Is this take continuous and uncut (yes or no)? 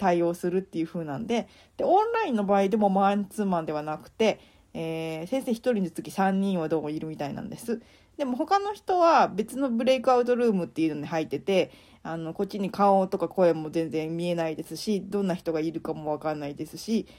yes